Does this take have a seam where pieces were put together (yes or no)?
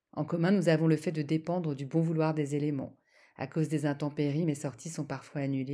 no